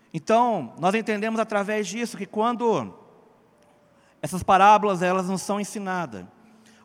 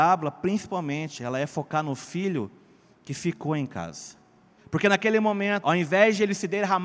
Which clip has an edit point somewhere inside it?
second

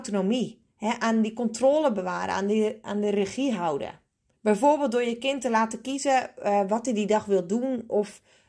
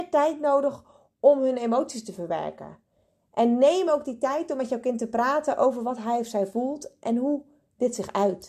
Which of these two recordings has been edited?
first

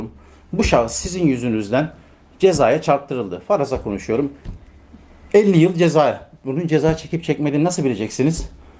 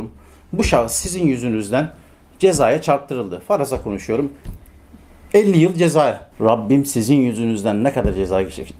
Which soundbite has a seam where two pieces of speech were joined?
second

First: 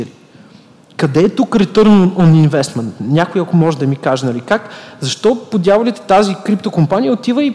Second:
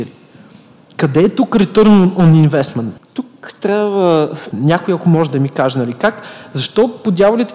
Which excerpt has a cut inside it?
second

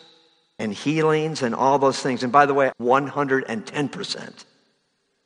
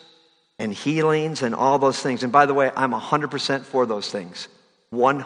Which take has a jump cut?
first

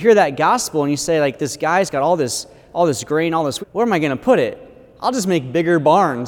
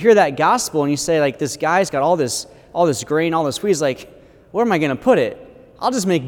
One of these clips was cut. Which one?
first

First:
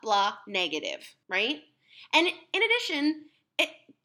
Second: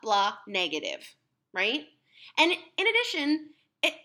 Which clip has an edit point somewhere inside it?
first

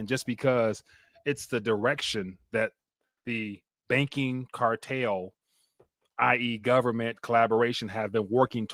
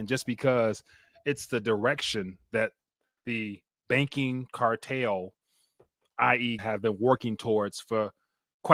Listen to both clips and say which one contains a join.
second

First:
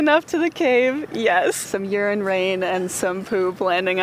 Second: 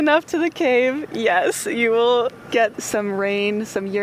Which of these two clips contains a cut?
first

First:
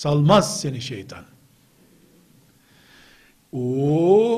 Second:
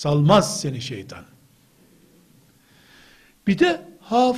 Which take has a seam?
first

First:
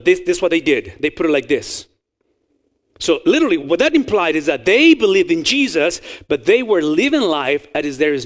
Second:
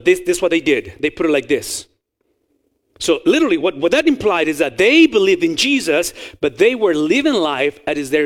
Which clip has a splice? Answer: first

